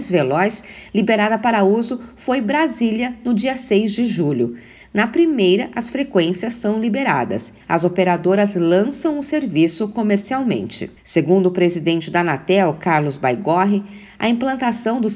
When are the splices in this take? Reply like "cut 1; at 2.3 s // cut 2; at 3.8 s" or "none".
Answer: cut 1; at 4.8 s // cut 2; at 7.6 s // cut 3; at 11.0 s